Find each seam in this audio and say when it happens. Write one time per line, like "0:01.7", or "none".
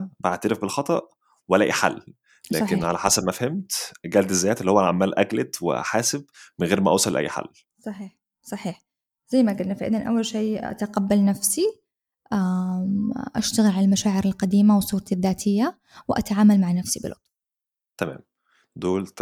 none